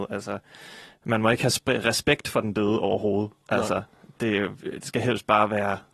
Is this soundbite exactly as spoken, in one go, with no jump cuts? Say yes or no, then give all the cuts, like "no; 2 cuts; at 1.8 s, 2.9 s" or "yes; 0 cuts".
yes; 0 cuts